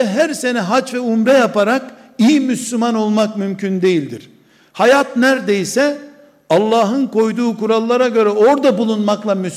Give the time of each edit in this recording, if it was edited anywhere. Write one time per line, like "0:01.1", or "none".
none